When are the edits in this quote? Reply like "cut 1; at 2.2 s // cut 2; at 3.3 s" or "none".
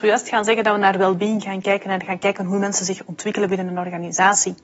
none

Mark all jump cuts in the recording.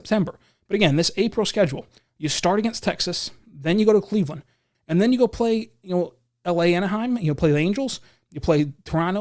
cut 1; at 4.7 s

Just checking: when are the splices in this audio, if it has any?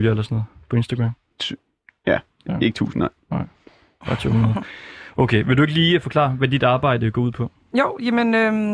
none

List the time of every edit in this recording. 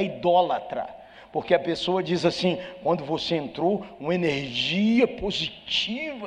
none

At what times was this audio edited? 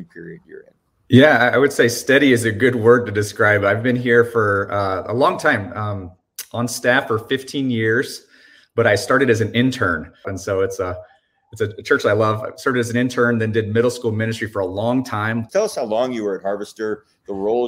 cut 1; at 10.2 s // cut 2; at 15.5 s

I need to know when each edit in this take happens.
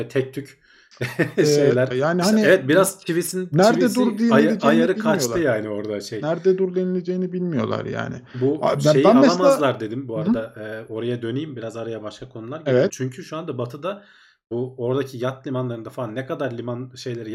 cut 1; at 1.9 s // cut 2; at 12.9 s

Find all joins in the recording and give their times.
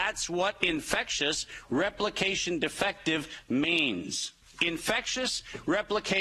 cut 1; at 4.4 s

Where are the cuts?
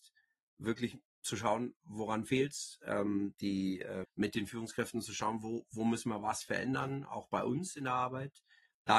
cut 1; at 4.0 s

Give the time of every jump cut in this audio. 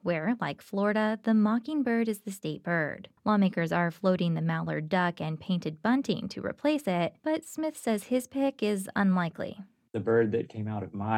cut 1; at 3.2 s // cut 2; at 7.2 s

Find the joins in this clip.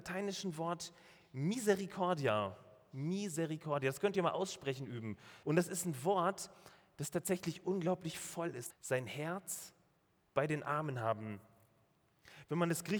cut 1; at 5.4 s // cut 2; at 8.7 s

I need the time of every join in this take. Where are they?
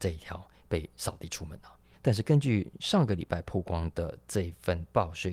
cut 1; at 1.9 s

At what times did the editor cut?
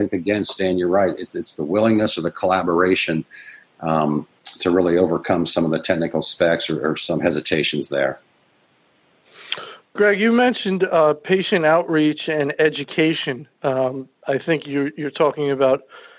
none

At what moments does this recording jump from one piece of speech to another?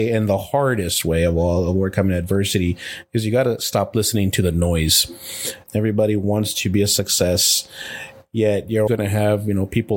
cut 1; at 5.7 s // cut 2; at 8.9 s

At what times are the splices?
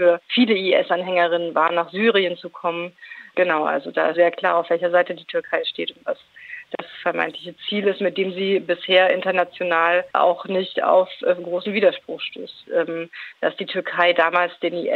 cut 1; at 4.1 s // cut 2; at 12.7 s

